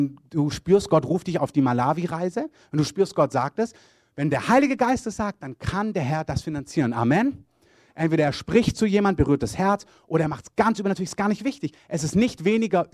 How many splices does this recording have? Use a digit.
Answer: 0